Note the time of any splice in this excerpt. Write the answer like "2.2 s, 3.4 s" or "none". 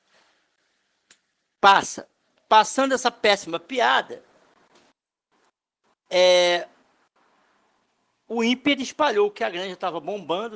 none